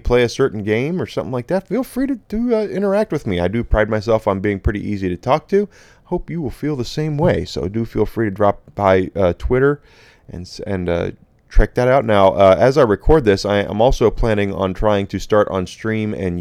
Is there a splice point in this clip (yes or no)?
no